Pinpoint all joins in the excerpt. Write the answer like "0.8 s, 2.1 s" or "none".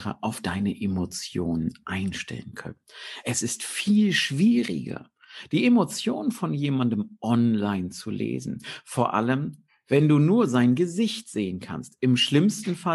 none